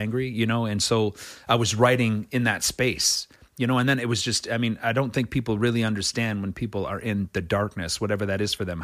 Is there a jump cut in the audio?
no; 0 cuts

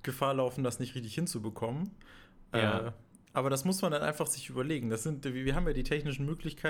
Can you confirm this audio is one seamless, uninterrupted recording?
yes; 0 cuts

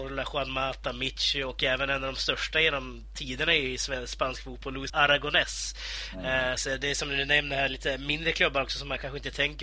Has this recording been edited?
yes; 2 cuts; at 4.9 s, 6.6 s

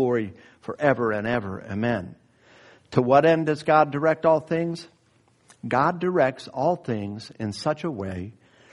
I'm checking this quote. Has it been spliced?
no; 0 cuts

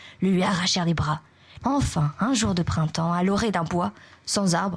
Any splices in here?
yes; 1 cut; at 1.6 s

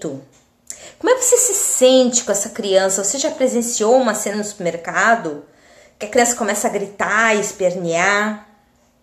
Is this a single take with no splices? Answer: no; 1 cut; at 4.3 s

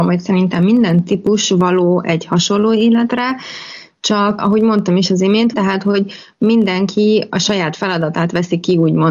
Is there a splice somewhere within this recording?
yes; 2 cuts; at 4.4 s, 5.5 s

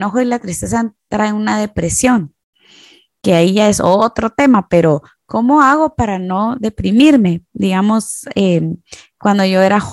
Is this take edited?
no; 0 cuts

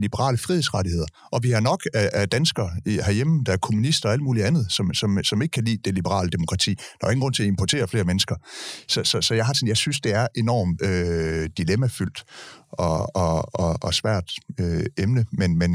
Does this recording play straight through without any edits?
yes; 0 cuts

